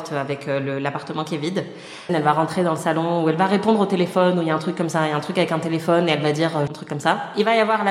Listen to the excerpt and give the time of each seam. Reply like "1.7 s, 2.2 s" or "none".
2.1 s, 6.7 s

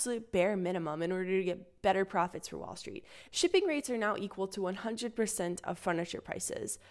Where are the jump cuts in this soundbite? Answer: 3.3 s

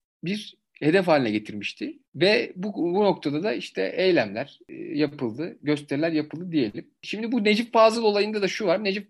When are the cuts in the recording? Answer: none

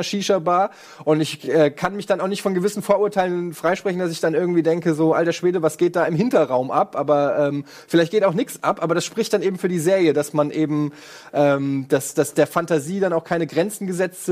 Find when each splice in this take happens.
none

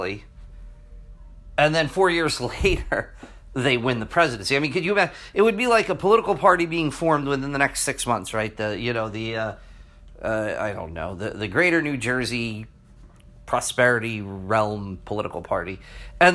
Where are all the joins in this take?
none

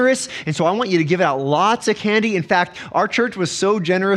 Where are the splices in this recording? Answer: none

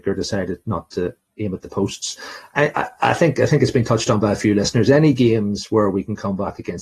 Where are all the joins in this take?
2.5 s

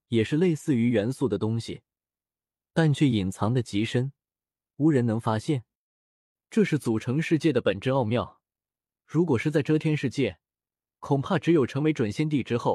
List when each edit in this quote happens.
none

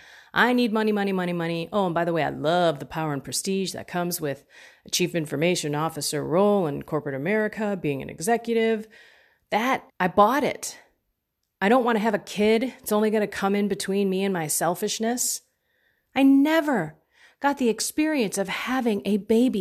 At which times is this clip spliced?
9.9 s, 16.1 s

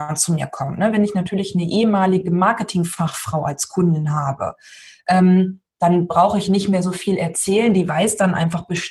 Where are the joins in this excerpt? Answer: none

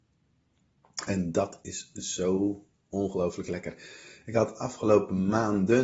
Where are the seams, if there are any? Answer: none

